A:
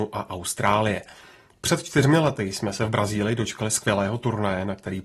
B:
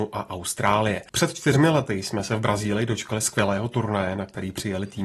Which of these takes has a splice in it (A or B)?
B